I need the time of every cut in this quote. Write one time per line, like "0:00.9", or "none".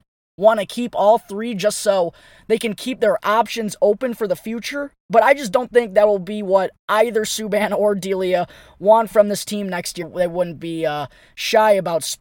0:10.0